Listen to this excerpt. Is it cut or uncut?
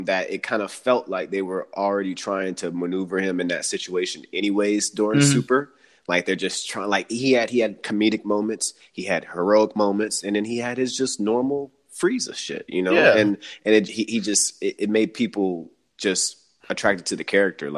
uncut